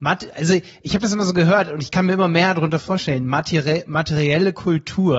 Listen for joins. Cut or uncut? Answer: uncut